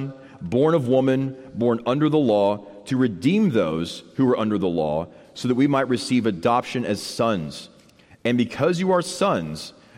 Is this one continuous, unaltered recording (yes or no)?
yes